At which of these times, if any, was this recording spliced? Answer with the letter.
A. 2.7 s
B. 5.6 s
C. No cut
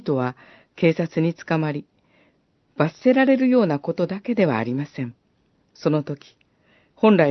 B